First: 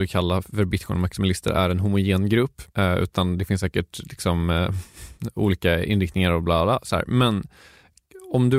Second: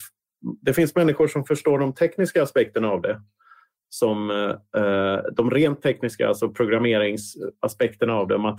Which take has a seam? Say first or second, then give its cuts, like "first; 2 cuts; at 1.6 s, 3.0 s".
first; 1 cut; at 2.7 s